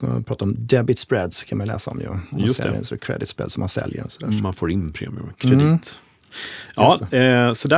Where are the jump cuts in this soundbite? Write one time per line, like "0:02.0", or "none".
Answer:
none

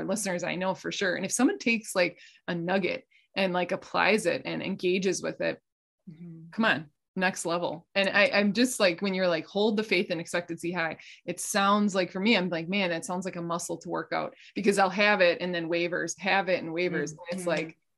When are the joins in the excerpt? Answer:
none

